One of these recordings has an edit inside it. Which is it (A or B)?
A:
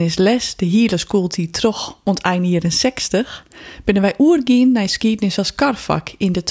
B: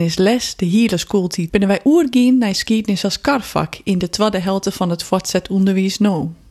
B